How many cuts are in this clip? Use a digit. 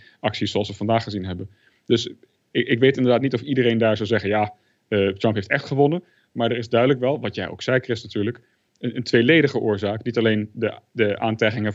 0